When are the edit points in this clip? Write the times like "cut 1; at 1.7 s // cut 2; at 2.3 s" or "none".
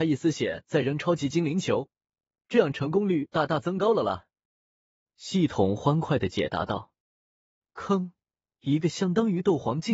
none